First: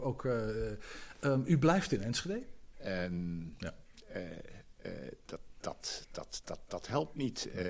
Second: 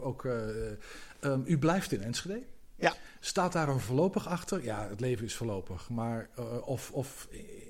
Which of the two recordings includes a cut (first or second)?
first